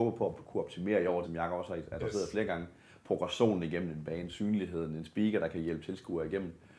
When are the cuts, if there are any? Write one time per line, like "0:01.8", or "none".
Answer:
0:01.2